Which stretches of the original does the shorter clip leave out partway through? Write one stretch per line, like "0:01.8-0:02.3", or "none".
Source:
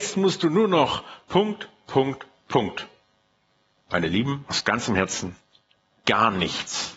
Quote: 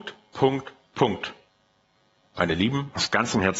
none